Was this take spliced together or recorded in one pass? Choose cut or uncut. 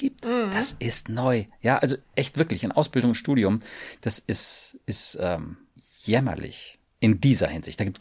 uncut